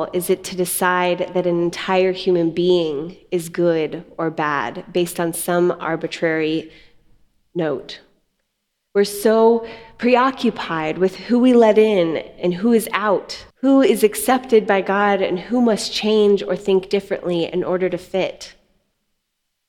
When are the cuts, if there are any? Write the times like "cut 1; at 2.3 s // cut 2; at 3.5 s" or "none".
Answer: cut 1; at 8.9 s // cut 2; at 13.5 s